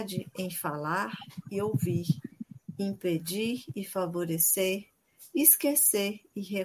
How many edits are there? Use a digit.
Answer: 0